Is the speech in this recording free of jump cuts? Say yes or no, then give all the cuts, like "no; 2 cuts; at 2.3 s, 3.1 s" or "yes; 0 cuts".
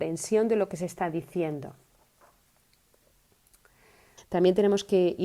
no; 1 cut; at 4.2 s